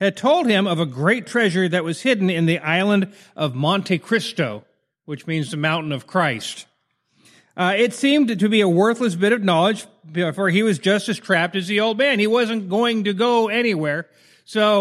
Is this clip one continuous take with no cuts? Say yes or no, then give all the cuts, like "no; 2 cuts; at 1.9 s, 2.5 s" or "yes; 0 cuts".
yes; 0 cuts